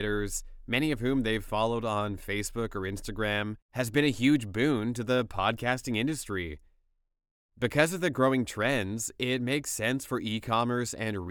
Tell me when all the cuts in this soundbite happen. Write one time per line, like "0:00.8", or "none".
none